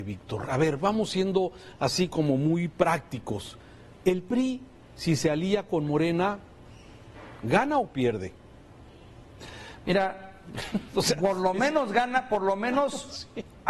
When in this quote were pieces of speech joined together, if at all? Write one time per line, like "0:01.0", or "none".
none

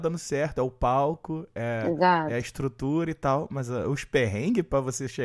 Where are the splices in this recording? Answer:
none

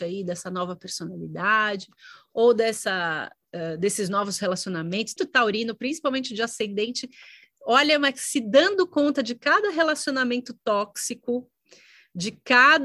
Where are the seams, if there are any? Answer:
0:05.2

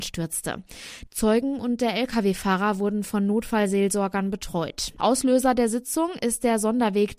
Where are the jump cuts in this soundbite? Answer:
0:01.1
0:05.0

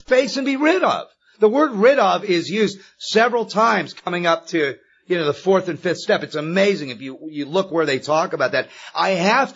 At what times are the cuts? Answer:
none

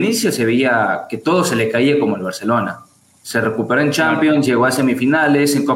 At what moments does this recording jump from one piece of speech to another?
none

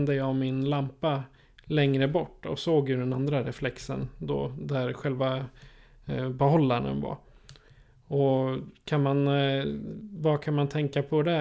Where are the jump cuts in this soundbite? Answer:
none

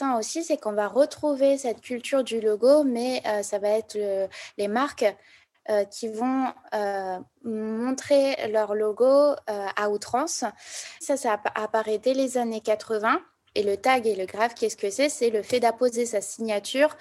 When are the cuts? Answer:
0:11.0
0:13.5

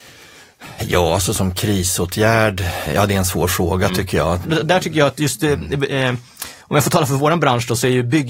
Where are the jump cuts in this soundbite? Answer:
0:02.9
0:04.4

